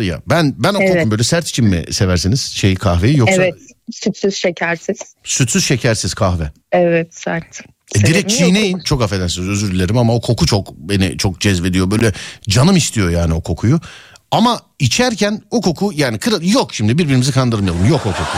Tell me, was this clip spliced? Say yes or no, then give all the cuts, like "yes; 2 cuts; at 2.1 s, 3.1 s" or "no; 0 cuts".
yes; 3 cuts; at 1.0 s, 6.6 s, 8.8 s